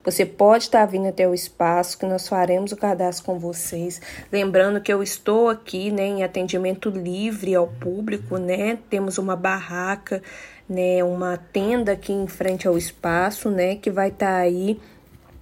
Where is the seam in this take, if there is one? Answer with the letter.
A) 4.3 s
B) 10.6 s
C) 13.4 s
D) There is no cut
D